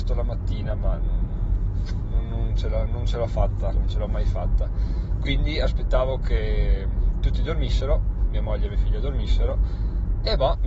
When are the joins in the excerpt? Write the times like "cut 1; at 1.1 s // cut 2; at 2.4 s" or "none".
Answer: cut 1; at 3.7 s